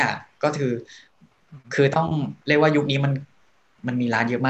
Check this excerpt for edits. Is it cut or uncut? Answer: cut